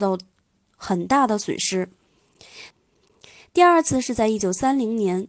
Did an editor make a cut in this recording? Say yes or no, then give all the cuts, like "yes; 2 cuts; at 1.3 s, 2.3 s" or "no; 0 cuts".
yes; 1 cut; at 2.7 s